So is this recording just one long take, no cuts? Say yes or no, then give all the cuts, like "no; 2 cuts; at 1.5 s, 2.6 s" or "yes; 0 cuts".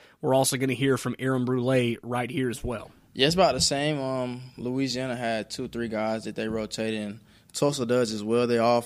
yes; 0 cuts